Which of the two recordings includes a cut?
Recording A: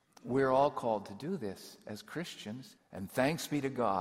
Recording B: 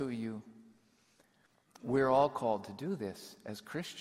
A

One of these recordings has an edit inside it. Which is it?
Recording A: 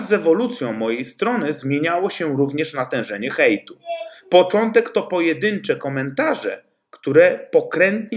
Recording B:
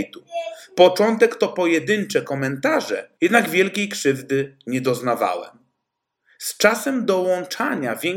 B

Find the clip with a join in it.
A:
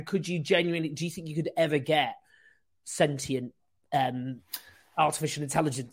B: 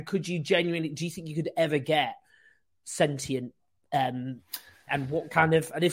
B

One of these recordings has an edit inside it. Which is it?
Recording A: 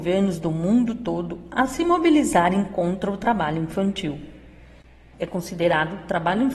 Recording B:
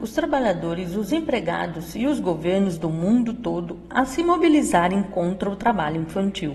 A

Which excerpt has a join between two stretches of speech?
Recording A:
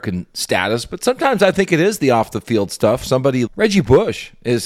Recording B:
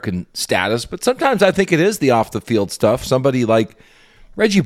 A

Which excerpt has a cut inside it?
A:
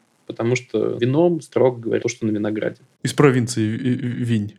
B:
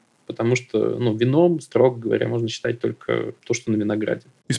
A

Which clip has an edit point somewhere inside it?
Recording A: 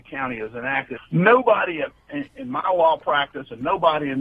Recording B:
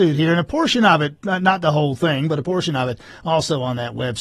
A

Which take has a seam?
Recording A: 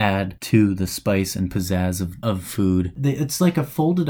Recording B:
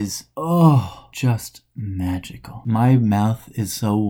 A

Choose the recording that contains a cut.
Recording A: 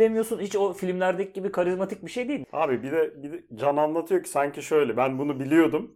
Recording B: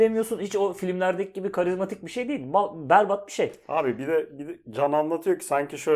A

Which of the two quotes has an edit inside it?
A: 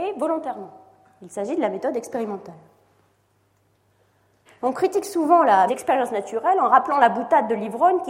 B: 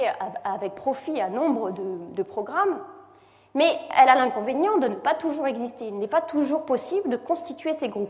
A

